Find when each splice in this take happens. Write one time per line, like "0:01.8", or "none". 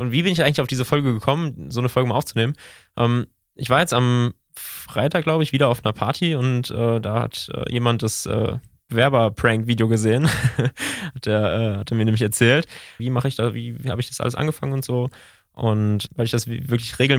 0:13.0
0:16.1